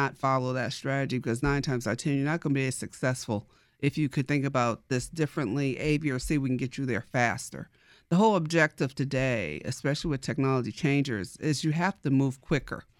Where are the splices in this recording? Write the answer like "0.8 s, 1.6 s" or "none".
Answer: none

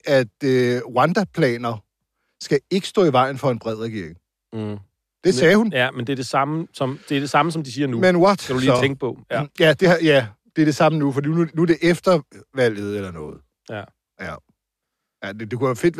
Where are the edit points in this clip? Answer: none

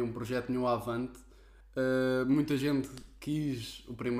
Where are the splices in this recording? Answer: 1.6 s

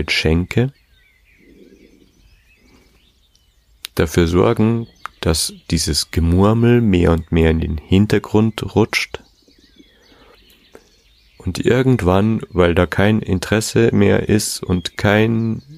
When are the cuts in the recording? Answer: none

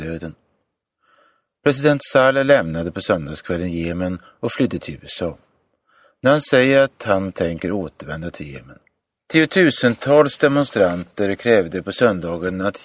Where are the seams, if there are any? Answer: 9.2 s

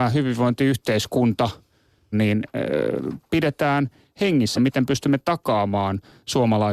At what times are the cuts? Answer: 2.1 s, 4.6 s

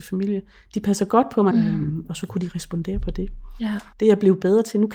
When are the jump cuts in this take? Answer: 1.5 s

